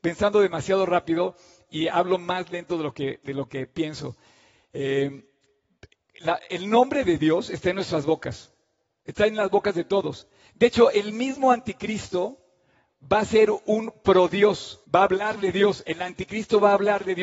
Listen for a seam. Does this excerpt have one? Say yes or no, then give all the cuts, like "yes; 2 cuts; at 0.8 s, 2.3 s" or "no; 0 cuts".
yes; 1 cut; at 14.8 s